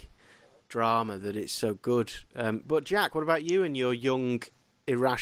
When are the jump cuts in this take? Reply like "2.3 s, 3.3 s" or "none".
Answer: none